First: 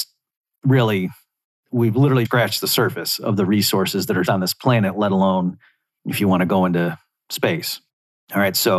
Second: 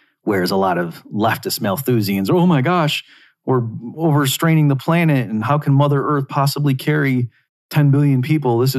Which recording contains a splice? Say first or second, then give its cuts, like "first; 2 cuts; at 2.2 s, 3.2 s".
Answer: first; 2 cuts; at 2.2 s, 4.2 s